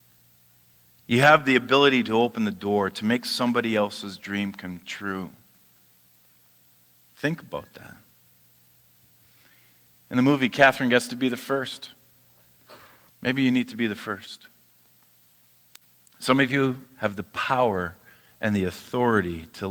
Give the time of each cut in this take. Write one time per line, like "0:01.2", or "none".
0:13.1